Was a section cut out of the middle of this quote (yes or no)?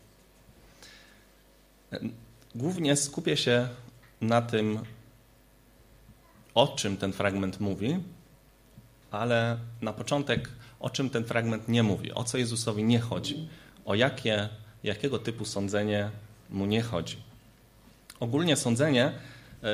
no